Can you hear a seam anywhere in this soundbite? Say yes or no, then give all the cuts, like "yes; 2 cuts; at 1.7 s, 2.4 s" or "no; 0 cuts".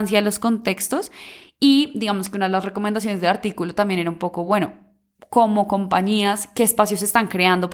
no; 0 cuts